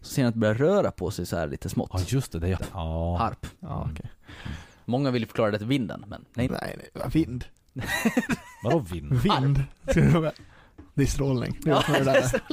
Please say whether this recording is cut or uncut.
cut